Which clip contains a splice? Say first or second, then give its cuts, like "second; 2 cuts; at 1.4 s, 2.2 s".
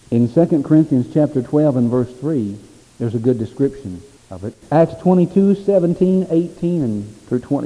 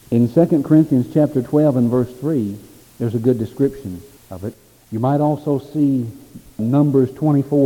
first; 1 cut; at 4.6 s